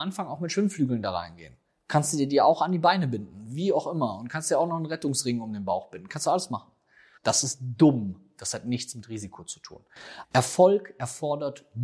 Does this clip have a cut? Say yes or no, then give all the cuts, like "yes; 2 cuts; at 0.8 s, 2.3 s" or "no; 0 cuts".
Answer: yes; 2 cuts; at 7.2 s, 10.2 s